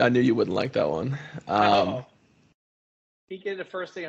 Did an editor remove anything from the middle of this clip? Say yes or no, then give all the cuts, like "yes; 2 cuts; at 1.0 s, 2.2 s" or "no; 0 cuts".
no; 0 cuts